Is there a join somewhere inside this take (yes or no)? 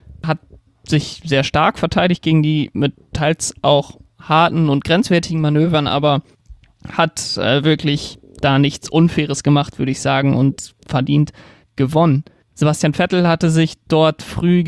no